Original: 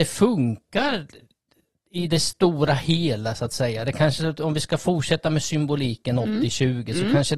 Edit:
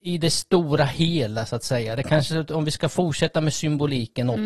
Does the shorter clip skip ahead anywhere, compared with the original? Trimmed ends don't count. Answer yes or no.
no